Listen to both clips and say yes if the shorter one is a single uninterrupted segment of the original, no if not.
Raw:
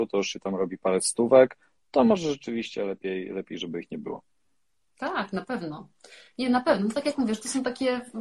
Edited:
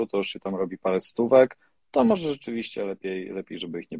yes